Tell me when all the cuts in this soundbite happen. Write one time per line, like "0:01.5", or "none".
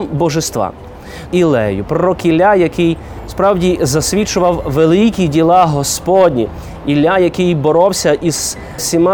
0:01.3